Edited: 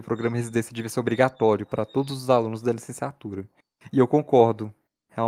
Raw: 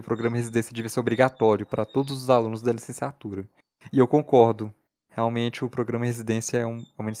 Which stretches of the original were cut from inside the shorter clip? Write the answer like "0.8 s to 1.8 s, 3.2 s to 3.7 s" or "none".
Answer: none